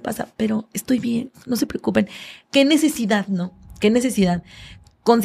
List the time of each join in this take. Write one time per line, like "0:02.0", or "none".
0:02.4